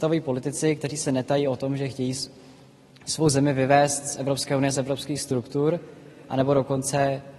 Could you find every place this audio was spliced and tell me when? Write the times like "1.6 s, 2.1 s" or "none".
none